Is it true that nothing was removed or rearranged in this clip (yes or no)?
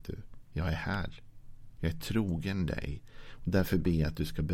no